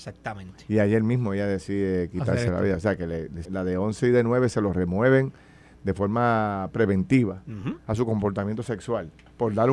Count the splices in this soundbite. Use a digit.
2